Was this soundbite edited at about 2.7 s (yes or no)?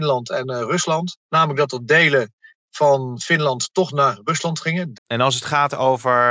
no